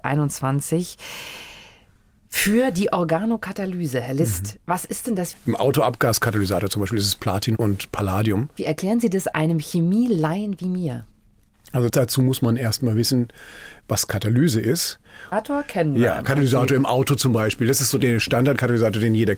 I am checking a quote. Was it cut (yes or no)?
yes